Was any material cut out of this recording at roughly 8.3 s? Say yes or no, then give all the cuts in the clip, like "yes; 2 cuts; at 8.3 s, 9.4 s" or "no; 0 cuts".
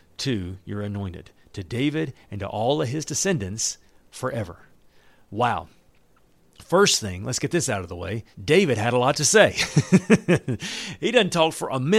yes; 1 cut; at 8.3 s